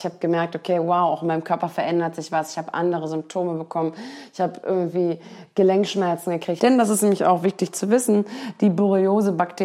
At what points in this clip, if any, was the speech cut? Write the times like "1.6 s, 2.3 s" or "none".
6.6 s